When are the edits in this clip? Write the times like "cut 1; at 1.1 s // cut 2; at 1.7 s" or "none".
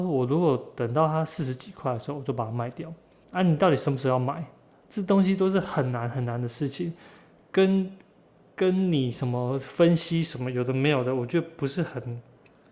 cut 1; at 3.2 s